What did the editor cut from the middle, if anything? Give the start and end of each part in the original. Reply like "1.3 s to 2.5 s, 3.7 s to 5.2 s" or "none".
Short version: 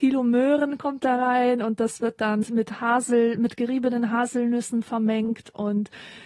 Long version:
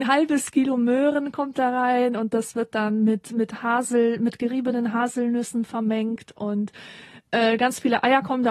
3.0 s to 3.2 s